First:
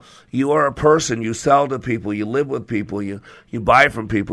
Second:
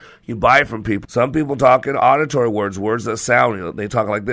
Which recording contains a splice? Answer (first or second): second